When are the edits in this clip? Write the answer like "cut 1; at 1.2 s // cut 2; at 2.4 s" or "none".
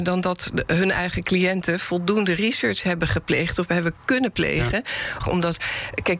cut 1; at 5.2 s